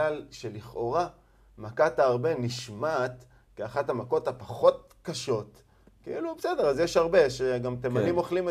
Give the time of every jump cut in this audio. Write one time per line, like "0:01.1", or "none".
none